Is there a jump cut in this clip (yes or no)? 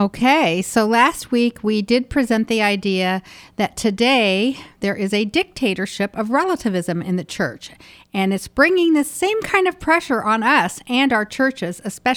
no